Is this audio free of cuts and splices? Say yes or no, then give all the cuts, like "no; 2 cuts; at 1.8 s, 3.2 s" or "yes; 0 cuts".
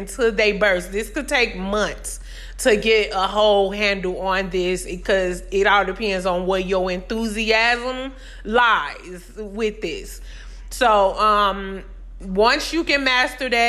yes; 0 cuts